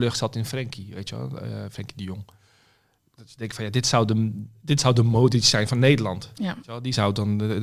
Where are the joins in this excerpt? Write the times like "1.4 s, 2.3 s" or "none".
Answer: none